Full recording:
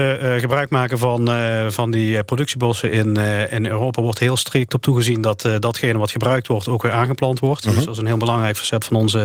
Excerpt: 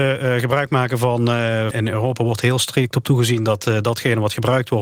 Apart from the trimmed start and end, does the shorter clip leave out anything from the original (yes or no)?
yes